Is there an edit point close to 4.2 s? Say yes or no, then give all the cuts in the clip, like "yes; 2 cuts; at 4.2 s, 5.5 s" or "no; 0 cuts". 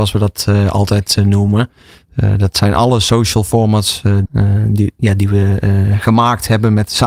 yes; 1 cut; at 4.2 s